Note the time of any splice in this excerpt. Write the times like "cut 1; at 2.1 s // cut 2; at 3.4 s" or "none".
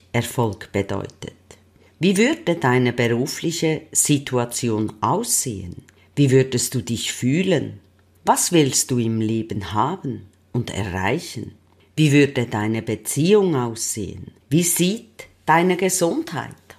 cut 1; at 14.4 s